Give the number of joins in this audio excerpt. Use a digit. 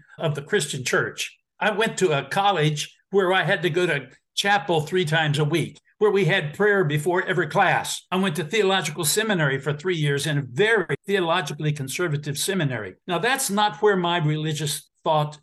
1